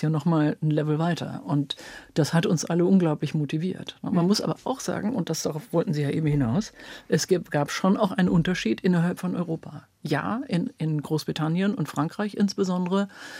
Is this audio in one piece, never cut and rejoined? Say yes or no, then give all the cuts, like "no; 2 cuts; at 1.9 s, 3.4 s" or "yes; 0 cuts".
yes; 0 cuts